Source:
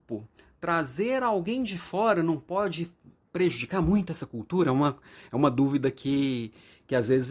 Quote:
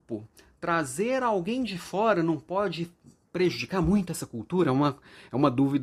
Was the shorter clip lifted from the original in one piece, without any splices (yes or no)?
yes